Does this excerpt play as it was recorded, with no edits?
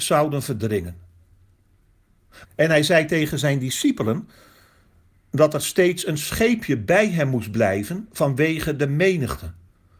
no; 1 cut; at 2.4 s

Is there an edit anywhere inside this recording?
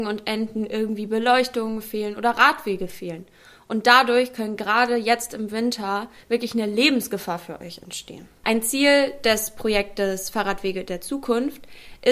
yes; 2 cuts; at 6.2 s, 8.4 s

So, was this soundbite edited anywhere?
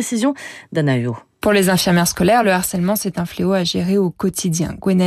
no; 0 cuts

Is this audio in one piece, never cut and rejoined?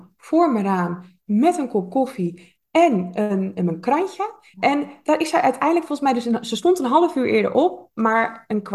no; 1 cut; at 4.5 s

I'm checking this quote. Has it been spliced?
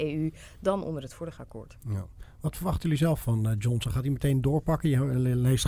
no; 0 cuts

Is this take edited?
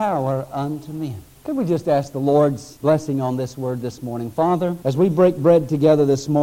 no; 0 cuts

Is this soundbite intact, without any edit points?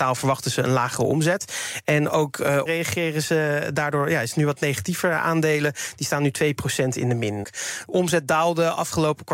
no; 2 cuts; at 2.7 s, 7.4 s

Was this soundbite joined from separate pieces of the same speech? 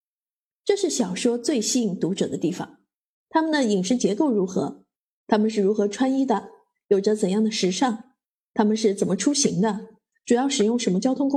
yes; 1 cut; at 3.1 s

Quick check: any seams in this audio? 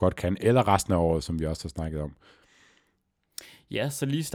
no; 0 cuts

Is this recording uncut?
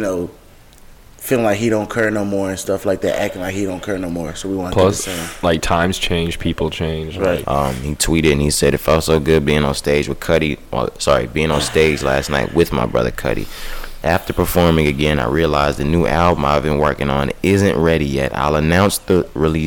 no; 1 cut; at 7.4 s

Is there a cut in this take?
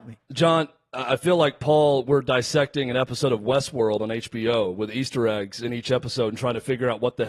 no; 0 cuts

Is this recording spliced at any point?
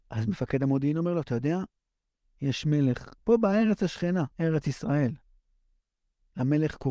yes; 2 cuts; at 3.2 s, 4.3 s

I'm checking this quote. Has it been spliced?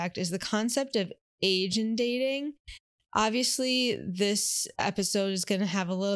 no; 0 cuts

